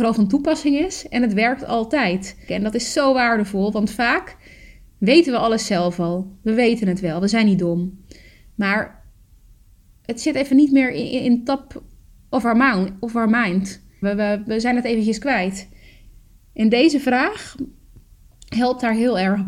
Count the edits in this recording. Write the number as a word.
two